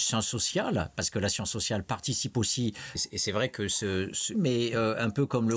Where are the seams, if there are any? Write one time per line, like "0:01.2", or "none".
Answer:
0:03.0
0:04.3